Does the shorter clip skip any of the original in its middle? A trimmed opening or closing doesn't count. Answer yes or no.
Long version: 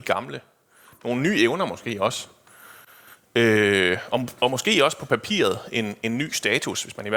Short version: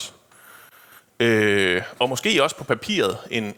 yes